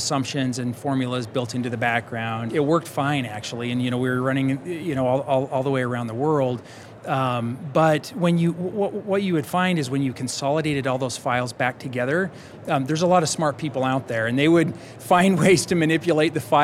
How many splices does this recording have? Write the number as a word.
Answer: one